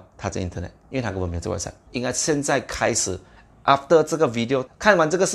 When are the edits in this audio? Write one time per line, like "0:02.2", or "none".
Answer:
0:01.9